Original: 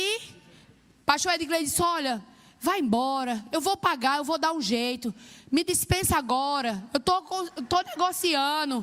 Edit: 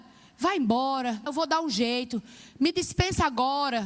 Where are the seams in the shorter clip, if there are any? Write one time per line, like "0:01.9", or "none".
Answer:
0:01.3